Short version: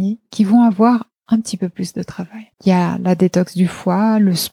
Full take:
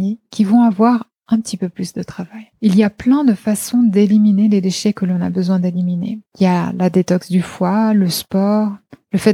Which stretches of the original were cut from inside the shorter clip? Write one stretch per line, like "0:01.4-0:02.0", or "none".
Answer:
0:02.5-0:06.3